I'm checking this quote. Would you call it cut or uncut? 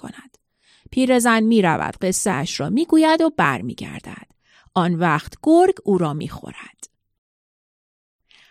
uncut